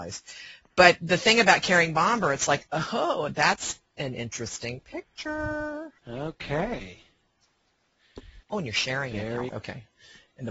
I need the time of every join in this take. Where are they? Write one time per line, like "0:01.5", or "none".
0:06.0
0:08.4
0:09.5

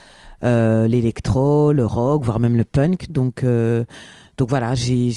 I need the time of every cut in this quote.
0:03.1

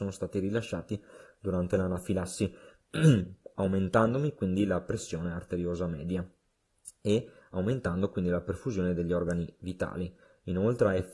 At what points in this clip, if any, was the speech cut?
none

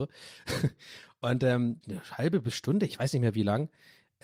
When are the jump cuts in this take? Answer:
0:01.8

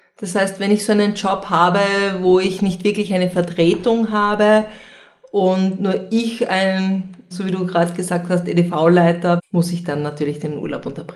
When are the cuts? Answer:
0:07.3
0:09.4

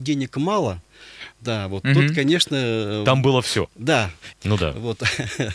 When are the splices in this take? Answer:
0:04.3

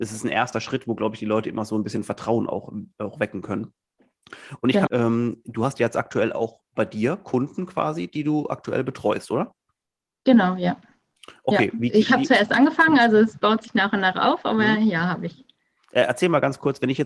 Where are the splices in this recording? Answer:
0:04.9

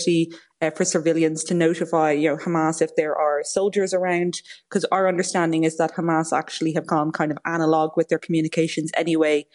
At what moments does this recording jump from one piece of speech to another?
none

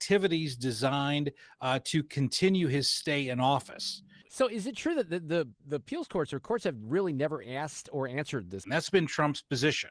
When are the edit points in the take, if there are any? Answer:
0:04.2
0:08.6

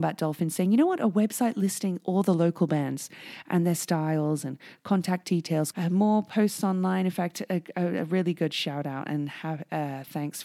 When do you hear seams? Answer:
0:05.7

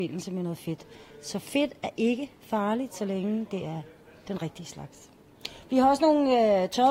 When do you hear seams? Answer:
none

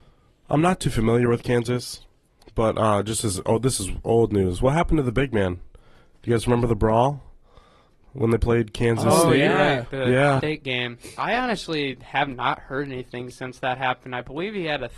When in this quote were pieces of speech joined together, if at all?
0:10.4

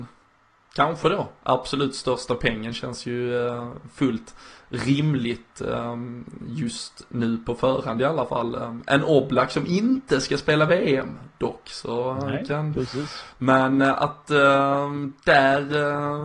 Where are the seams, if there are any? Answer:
0:13.3

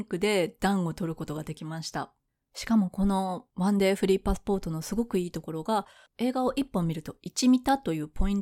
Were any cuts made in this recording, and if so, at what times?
0:06.1

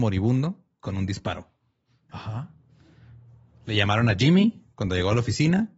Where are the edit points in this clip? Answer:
0:02.1
0:04.7

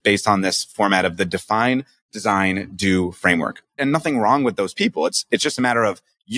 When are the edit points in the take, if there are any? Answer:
0:03.8

